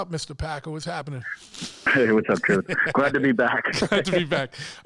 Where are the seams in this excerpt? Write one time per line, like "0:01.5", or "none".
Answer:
none